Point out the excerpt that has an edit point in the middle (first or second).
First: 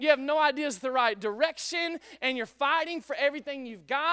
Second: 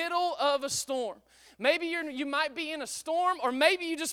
second